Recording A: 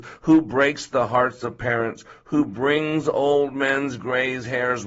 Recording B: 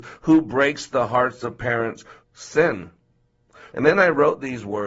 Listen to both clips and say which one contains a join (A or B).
B